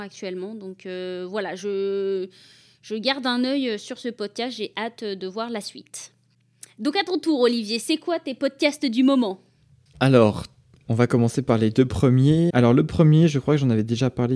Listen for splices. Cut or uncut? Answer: cut